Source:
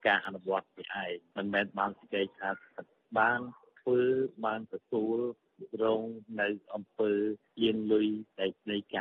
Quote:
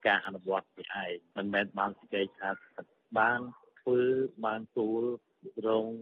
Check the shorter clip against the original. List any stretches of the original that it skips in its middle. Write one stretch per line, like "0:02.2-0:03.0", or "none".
0:04.7-0:04.8